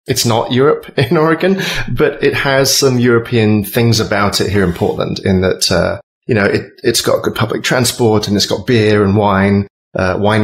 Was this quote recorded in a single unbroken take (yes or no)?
yes